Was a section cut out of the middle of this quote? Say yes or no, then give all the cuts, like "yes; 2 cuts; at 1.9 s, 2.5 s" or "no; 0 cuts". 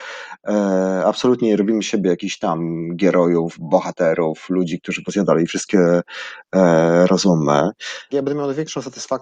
yes; 1 cut; at 8.1 s